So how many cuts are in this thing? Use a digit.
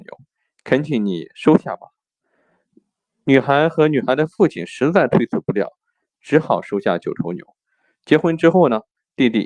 0